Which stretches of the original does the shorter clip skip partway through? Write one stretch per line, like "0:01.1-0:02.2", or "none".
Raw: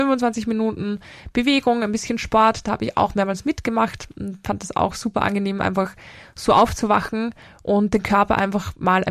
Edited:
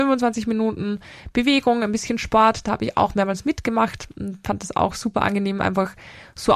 none

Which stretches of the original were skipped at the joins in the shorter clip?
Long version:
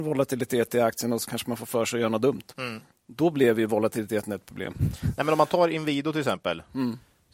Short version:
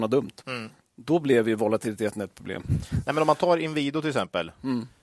none

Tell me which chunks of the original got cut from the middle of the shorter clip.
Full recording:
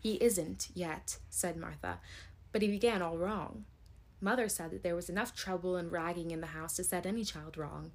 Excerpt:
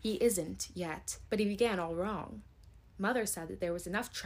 0:01.3-0:02.5

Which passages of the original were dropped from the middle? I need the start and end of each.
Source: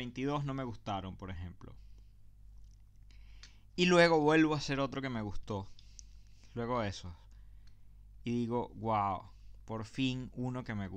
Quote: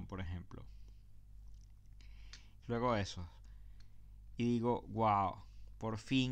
0:03.7-0:06.5

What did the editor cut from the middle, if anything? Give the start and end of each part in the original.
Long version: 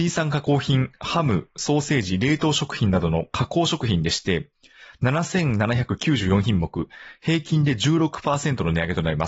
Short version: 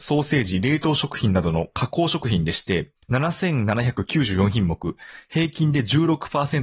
0:04.6-0:04.9

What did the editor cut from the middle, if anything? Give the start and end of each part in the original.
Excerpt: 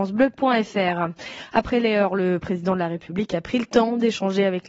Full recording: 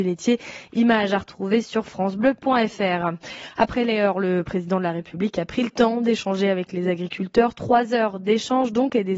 none

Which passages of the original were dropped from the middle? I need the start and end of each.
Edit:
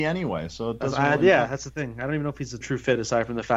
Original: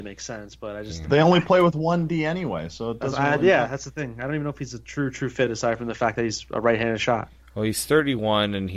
0:04.8-0:05.1

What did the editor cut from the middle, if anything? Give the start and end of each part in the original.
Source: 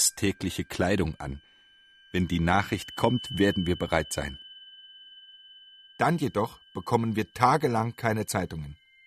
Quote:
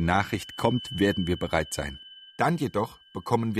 0:04.7-0:05.9

